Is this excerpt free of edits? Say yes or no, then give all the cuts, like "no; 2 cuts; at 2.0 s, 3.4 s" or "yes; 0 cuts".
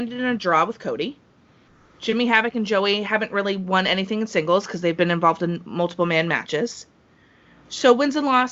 yes; 0 cuts